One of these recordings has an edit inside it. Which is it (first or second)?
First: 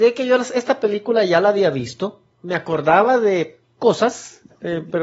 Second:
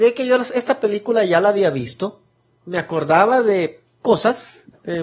first